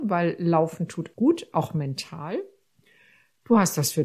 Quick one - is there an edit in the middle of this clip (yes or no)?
yes